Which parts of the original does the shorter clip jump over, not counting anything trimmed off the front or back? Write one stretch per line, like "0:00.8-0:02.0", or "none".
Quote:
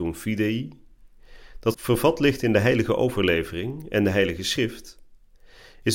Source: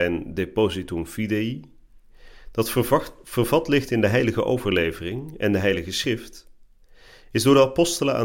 0:02.6-0:03.2